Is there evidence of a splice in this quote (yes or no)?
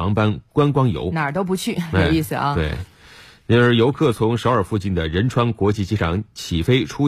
no